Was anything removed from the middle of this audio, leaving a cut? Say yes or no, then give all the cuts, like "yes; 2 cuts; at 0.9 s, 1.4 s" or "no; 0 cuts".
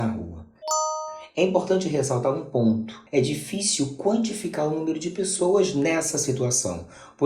yes; 1 cut; at 3.1 s